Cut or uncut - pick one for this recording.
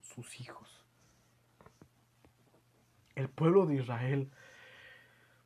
uncut